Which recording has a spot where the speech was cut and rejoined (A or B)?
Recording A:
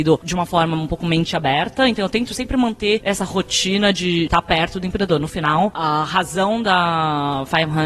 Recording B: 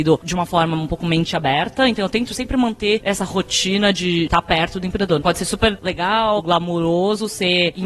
B